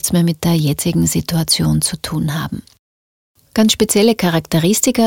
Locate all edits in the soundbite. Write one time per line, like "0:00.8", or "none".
none